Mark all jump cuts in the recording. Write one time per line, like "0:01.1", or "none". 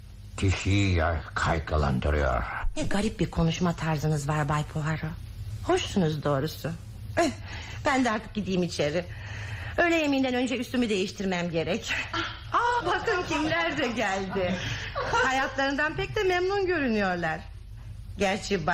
0:12.8